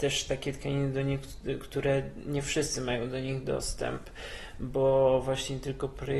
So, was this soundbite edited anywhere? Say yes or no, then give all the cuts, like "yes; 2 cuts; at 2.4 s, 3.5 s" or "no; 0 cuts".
no; 0 cuts